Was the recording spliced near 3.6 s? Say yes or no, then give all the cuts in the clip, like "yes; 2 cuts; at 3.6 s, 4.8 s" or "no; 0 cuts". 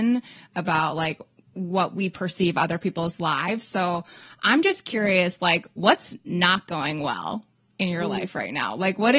no; 0 cuts